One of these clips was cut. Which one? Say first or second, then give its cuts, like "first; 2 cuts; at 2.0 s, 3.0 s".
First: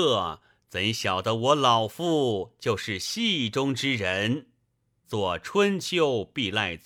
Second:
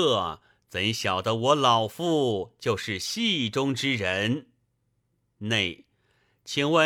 first; 1 cut; at 5.0 s